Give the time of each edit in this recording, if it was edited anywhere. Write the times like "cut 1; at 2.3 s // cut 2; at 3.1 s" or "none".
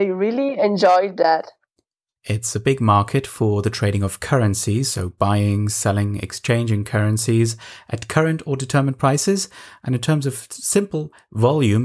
cut 1; at 2.2 s